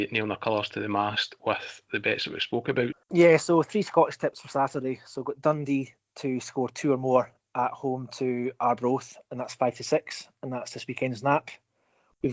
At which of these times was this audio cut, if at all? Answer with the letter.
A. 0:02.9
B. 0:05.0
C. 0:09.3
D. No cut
A